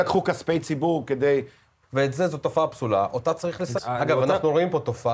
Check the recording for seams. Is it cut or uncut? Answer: cut